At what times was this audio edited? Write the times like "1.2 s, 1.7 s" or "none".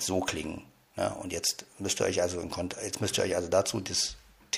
none